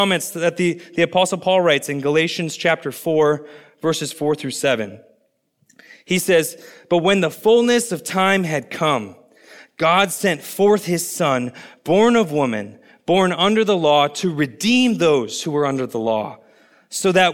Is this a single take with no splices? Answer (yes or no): yes